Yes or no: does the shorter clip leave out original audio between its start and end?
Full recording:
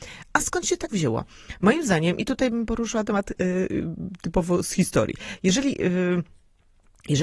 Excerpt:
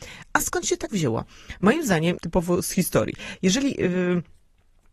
yes